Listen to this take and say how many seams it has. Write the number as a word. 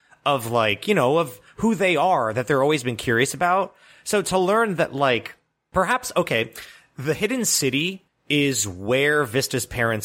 zero